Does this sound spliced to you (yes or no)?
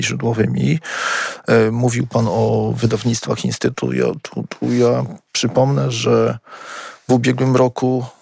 no